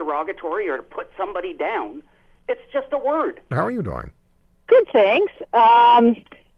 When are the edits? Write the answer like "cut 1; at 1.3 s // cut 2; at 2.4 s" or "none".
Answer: cut 1; at 3.5 s